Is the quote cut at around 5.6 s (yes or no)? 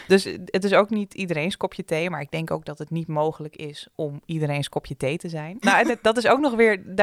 yes